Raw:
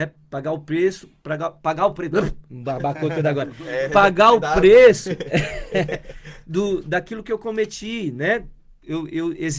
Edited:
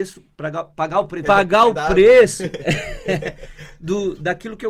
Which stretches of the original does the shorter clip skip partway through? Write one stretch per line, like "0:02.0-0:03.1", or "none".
0:02.1-0:03.9